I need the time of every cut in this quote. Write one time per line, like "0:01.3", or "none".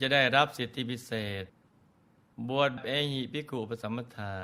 0:02.8

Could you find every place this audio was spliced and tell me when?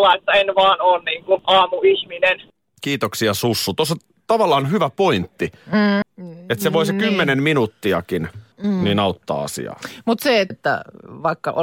0:06.0
0:08.5
0:10.5

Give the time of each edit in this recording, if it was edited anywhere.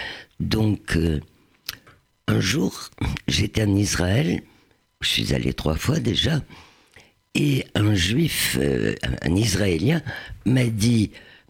none

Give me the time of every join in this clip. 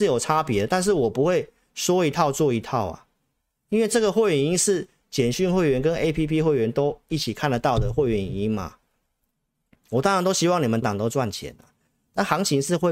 0:10.8

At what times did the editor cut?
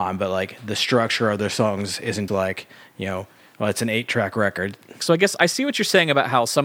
0:02.3
0:05.0

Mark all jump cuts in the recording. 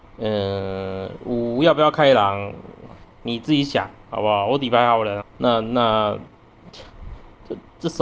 0:05.2

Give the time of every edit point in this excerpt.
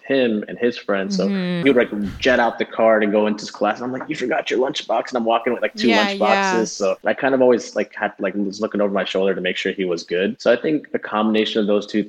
0:01.6

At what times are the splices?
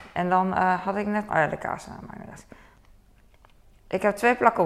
0:01.3

